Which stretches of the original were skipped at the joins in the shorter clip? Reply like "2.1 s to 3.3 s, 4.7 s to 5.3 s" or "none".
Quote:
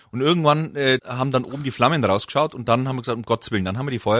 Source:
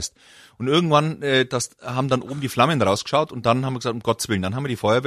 1.5 s to 1.8 s